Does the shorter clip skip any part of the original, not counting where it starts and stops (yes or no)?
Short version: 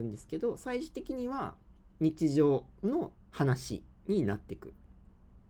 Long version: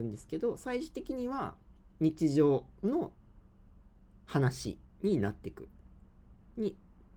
yes